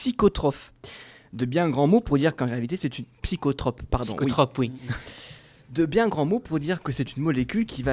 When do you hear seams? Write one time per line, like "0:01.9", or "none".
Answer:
none

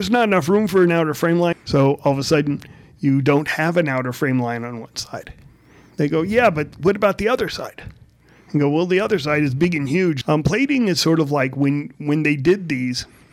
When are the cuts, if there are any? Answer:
0:01.5
0:10.2

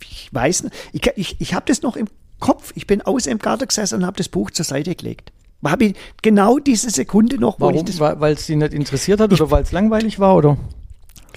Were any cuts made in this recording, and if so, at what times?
none

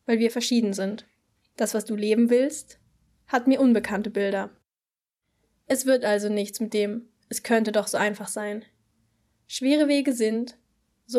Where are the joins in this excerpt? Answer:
0:01.5

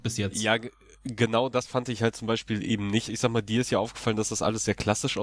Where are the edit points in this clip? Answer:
0:03.1

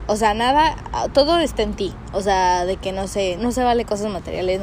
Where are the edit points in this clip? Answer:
0:03.4

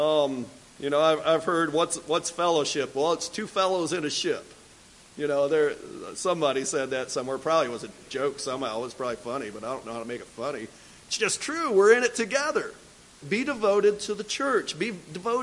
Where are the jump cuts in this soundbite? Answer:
0:13.2

